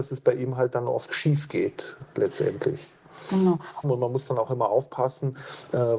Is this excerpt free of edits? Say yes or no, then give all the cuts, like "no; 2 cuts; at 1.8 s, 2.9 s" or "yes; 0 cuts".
no; 2 cuts; at 1.1 s, 3.8 s